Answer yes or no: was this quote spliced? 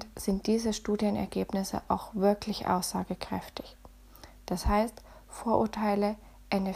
no